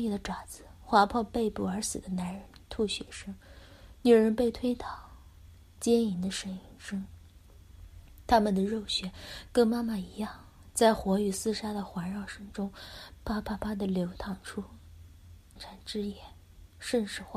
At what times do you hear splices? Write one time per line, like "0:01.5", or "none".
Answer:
0:15.6